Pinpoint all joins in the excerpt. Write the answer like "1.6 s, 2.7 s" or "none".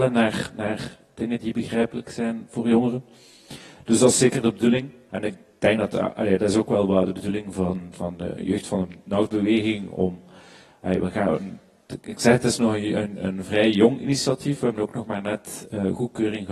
5.1 s